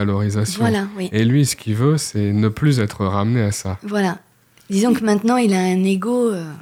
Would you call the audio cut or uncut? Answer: uncut